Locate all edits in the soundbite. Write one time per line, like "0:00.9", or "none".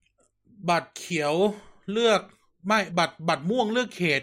none